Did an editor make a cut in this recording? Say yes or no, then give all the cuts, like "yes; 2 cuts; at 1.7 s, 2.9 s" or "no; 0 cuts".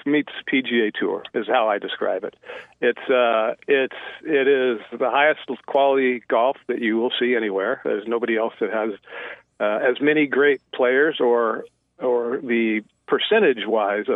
no; 0 cuts